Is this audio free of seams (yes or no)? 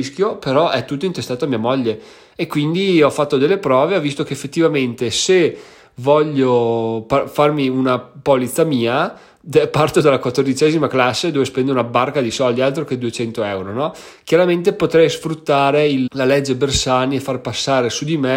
no